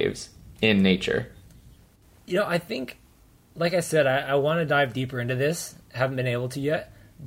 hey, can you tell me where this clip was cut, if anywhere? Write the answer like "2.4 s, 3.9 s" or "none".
none